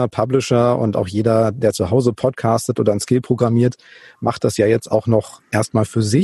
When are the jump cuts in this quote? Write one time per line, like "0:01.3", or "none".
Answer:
none